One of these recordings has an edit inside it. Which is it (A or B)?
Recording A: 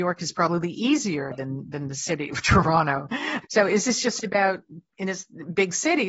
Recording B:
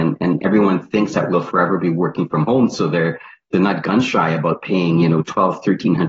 A